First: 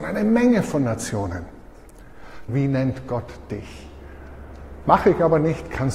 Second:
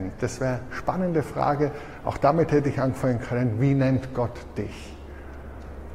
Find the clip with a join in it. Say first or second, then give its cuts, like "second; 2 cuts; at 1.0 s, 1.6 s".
first; 2 cuts; at 2.5 s, 4.8 s